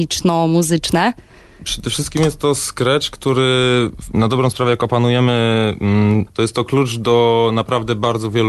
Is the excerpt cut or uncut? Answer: cut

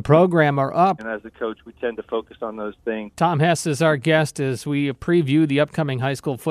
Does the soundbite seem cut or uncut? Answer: cut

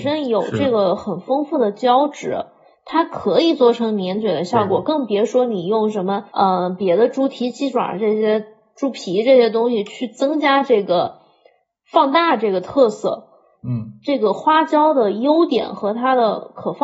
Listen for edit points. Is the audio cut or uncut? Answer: cut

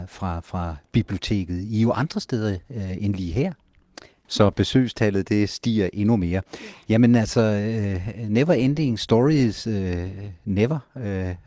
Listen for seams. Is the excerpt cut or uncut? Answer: cut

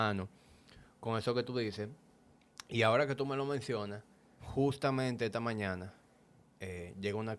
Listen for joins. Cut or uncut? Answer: cut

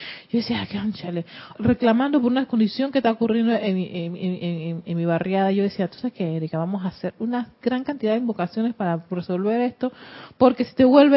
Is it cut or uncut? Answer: cut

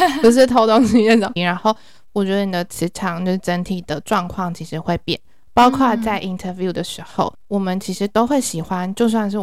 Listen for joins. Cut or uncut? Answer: cut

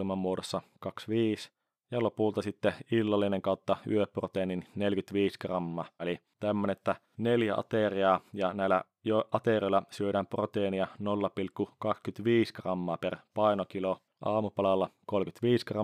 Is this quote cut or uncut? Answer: cut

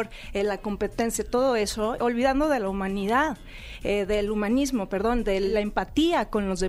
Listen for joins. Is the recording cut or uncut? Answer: cut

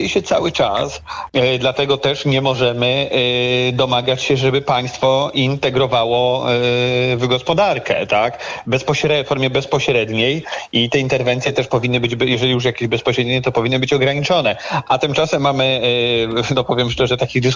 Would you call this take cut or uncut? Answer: cut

